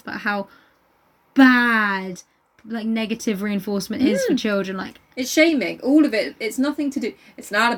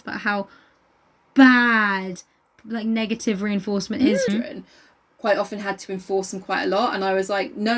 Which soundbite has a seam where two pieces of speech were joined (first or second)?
second